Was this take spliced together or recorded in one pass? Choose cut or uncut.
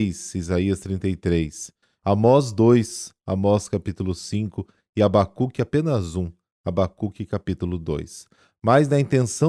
cut